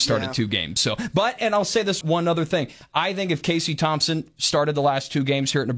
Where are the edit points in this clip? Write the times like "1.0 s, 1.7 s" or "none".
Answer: 2.0 s